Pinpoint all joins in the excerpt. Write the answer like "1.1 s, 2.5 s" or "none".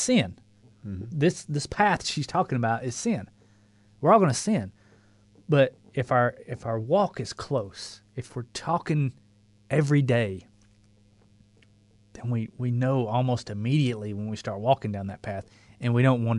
none